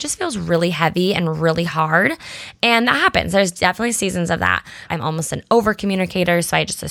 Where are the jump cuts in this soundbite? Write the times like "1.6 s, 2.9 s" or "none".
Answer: 4.9 s